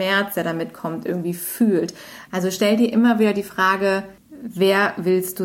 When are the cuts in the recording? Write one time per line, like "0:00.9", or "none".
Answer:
none